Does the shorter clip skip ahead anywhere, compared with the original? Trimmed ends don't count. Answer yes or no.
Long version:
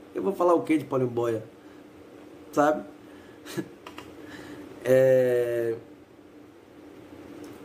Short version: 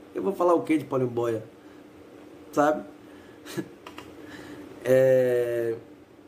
no